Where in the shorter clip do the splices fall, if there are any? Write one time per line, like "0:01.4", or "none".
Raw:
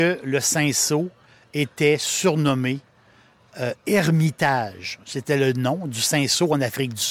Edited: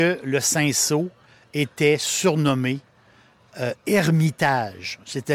none